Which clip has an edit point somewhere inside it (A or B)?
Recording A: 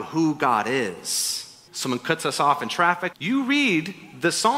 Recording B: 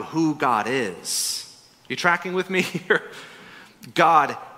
A